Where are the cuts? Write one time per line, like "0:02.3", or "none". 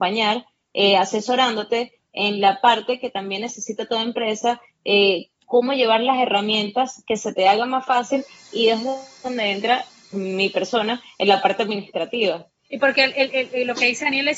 0:10.1
0:12.6